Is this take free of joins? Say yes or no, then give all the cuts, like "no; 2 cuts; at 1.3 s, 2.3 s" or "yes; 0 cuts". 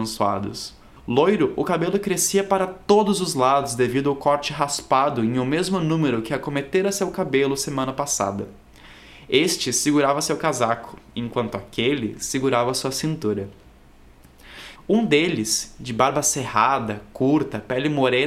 no; 1 cut; at 14.7 s